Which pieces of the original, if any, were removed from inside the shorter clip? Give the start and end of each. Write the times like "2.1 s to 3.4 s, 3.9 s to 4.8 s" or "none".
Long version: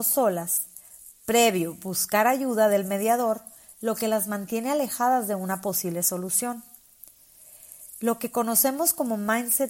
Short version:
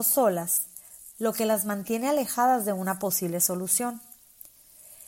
1.1 s to 3.8 s